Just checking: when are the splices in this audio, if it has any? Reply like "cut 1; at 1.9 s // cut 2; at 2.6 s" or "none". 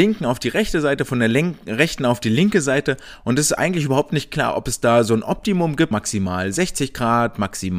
cut 1; at 5.9 s